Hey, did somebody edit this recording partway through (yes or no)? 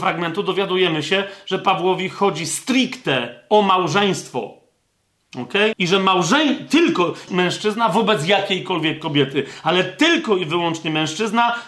yes